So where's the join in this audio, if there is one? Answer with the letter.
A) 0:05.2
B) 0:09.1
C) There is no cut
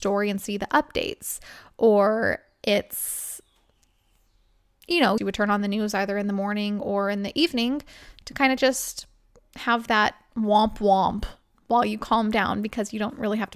A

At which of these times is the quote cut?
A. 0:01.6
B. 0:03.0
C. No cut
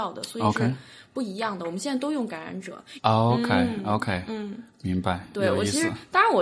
B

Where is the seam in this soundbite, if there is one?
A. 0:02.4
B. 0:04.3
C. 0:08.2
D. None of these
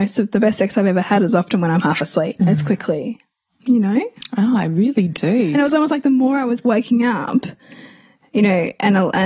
A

